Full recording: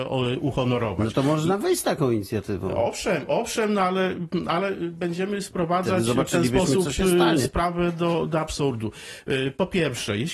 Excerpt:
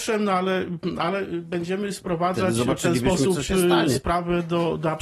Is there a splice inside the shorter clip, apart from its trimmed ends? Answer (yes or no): no